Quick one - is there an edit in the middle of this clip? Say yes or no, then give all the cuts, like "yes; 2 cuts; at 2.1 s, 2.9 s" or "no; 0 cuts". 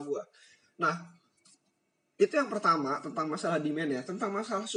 no; 0 cuts